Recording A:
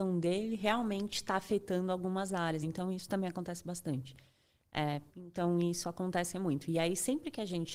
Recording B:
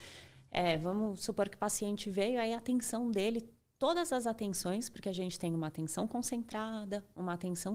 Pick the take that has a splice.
A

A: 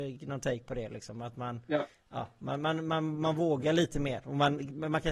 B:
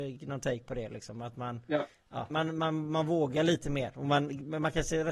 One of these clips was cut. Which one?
B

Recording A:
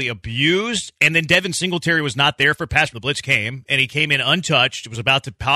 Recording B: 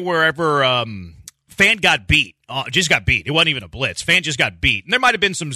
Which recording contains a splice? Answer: A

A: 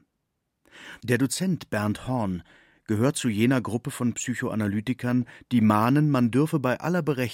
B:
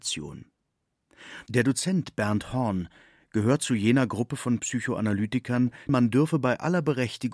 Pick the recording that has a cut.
B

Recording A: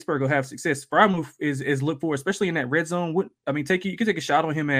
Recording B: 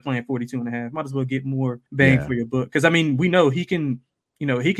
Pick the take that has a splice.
B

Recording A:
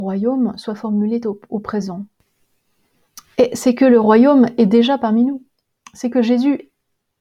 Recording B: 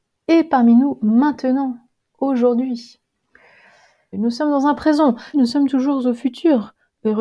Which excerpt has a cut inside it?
B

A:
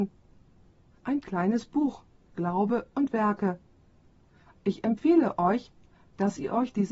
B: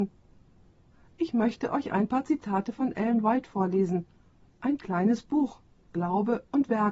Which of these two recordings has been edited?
A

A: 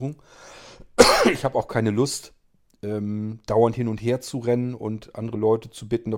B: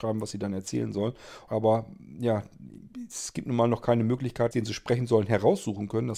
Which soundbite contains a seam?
B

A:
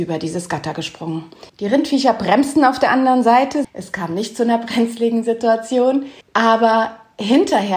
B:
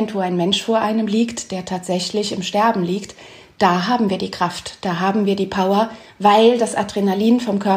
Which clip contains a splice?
A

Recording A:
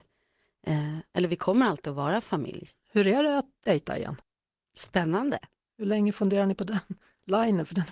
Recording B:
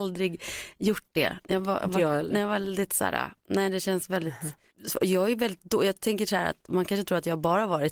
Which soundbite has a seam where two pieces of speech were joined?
A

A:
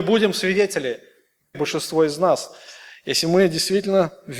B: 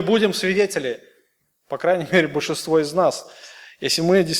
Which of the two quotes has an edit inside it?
A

